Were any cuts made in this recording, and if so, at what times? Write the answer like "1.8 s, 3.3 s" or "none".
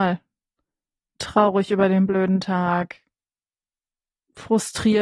1.0 s

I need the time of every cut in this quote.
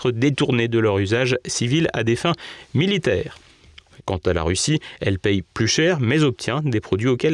4.0 s

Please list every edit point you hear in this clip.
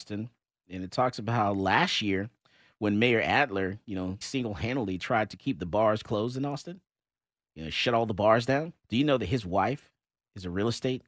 4.2 s, 8.8 s

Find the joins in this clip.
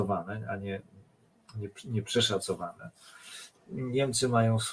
3.5 s

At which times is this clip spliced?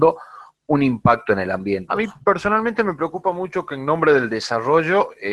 1.9 s

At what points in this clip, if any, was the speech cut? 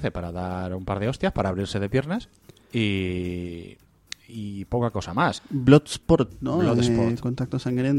5.4 s

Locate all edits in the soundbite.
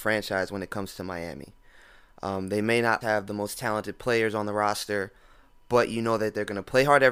3.0 s

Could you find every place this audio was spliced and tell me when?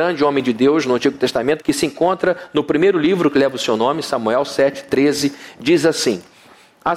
1.6 s

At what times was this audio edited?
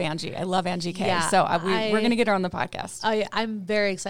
none

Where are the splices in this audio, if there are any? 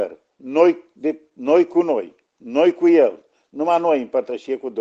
none

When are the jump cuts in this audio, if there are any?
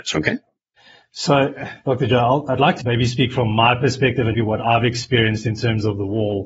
2.8 s, 4.3 s

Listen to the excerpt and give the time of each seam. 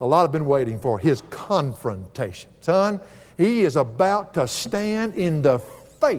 none

